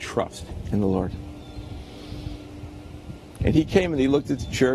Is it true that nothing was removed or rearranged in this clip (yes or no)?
no